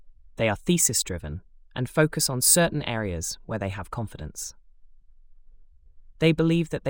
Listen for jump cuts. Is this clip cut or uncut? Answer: uncut